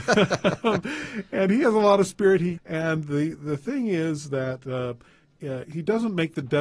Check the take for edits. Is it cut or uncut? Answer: cut